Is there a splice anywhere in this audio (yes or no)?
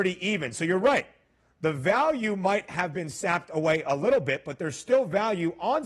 no